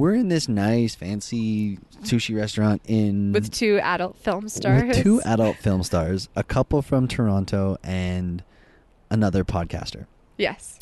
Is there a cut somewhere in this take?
no; 0 cuts

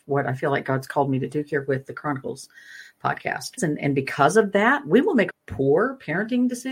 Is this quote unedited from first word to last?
no; 2 cuts; at 3.6 s, 5.3 s

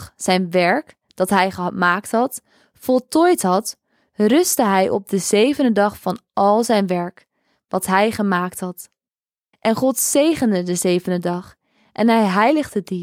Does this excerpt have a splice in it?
no; 0 cuts

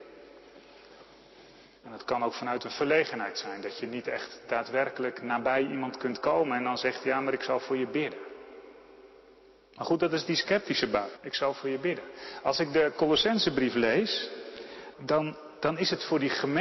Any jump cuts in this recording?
yes; 3 cuts; at 1.8 s, 11.1 s, 14.9 s

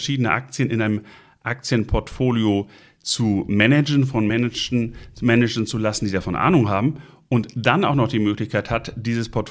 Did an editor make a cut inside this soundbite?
no; 0 cuts

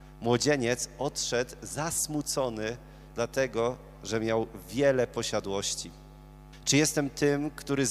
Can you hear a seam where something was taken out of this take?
yes; 1 cut; at 6.5 s

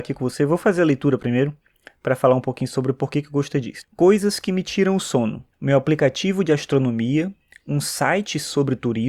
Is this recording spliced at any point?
yes; 2 cuts; at 3.8 s, 5.5 s

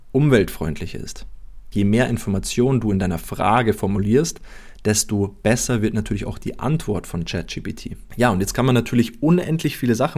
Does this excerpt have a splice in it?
yes; 2 cuts; at 1.7 s, 8.1 s

